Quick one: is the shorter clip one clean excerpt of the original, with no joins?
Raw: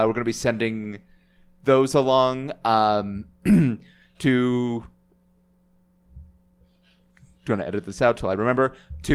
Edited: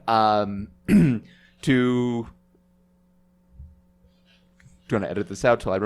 yes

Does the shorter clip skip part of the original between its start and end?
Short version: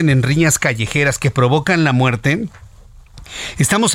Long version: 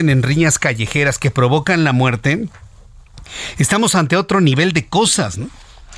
no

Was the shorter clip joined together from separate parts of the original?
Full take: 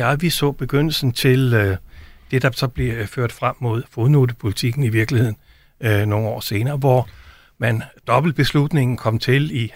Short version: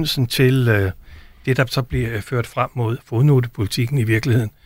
no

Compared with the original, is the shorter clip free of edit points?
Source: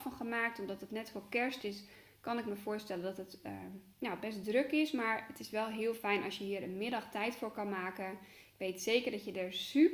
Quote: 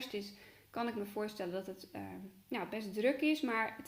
yes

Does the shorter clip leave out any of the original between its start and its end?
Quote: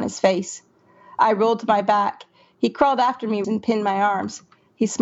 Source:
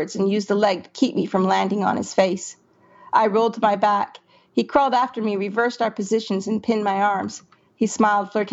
yes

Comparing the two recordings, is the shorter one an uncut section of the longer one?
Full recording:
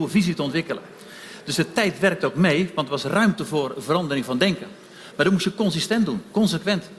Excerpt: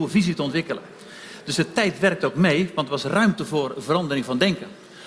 yes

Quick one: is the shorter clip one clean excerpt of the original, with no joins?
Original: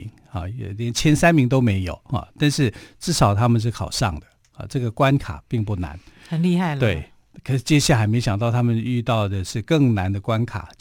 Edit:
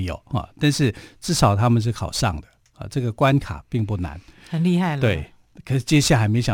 yes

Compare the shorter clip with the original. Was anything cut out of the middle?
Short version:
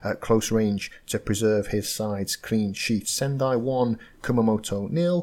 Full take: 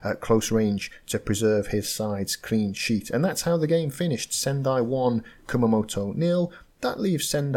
yes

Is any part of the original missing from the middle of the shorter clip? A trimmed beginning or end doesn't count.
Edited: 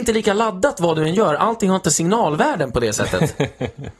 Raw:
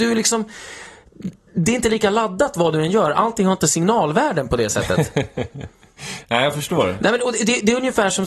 no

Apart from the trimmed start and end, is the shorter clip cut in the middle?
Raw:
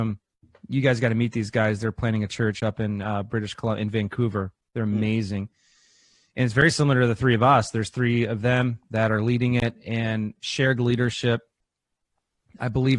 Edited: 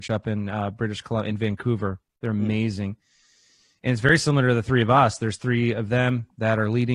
no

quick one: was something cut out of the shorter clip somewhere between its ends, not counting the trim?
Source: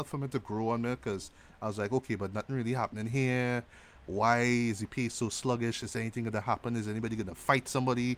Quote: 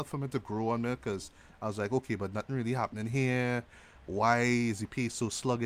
no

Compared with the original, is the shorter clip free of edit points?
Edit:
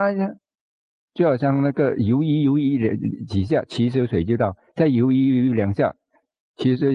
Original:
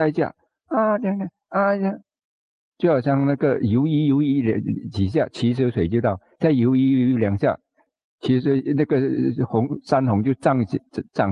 yes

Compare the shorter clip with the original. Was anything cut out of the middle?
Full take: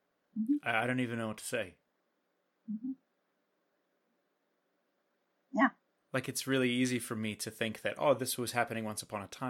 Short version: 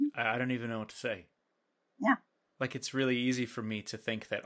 yes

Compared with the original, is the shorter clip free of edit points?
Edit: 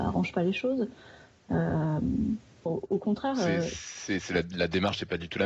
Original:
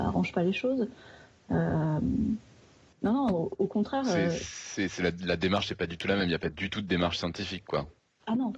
no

